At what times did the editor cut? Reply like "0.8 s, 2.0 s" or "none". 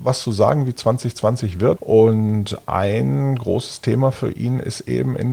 1.8 s